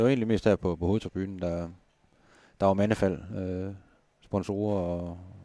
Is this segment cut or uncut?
uncut